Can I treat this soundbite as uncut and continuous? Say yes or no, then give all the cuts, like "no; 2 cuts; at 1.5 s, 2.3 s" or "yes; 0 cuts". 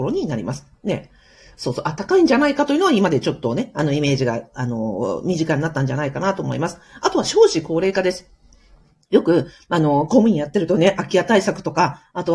yes; 0 cuts